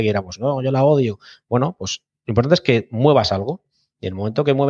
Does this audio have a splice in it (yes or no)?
no